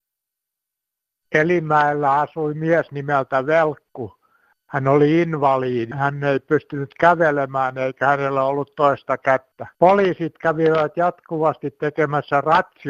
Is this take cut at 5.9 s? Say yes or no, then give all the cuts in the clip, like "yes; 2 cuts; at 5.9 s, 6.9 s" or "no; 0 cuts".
yes; 2 cuts; at 5.9 s, 9.7 s